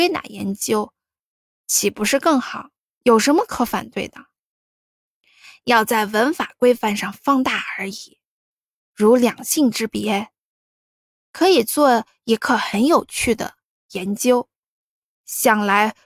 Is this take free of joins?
yes; 0 cuts

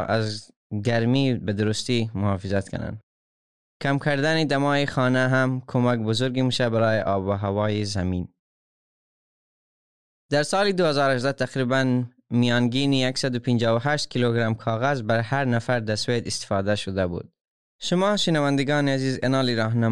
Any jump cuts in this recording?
yes; 1 cut; at 17.6 s

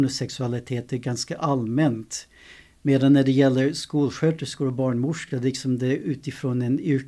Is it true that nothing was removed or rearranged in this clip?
yes; 0 cuts

